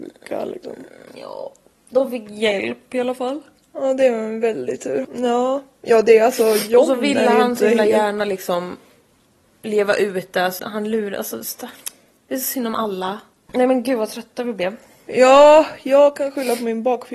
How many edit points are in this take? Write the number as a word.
three